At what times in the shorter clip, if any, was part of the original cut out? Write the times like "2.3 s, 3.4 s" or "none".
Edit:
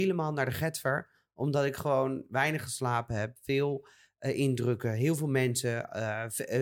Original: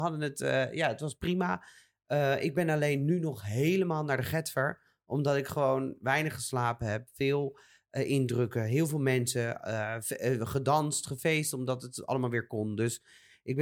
none